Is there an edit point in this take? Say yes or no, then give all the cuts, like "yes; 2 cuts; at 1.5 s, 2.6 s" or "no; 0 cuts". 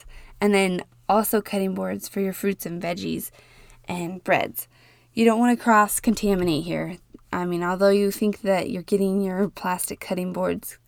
no; 0 cuts